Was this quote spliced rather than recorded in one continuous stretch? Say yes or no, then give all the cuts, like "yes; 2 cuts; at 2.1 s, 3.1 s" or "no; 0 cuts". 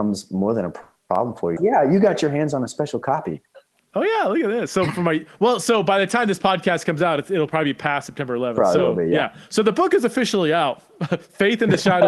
yes; 1 cut; at 1.6 s